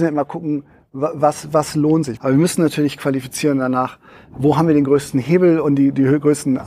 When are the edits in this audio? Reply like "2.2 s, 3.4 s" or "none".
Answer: 2.2 s